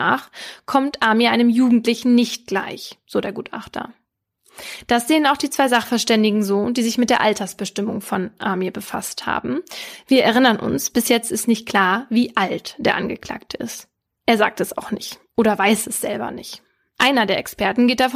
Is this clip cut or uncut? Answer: uncut